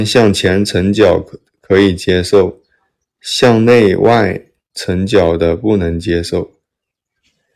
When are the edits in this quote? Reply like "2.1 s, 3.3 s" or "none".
none